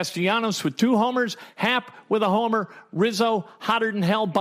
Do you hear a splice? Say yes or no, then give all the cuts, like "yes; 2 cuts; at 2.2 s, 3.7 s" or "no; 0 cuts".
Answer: no; 0 cuts